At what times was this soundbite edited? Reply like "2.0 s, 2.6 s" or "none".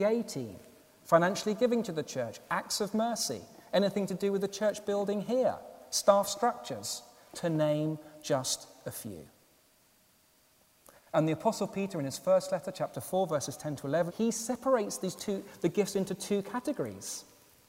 11.0 s, 14.1 s